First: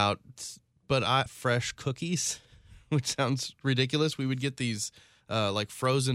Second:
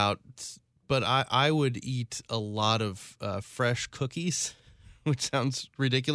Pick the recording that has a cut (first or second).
first